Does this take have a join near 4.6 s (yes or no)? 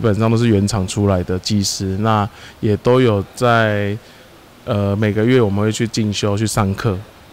no